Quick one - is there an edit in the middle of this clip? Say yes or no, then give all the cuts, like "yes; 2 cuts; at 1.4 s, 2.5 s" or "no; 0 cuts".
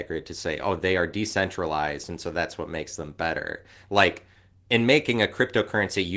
no; 0 cuts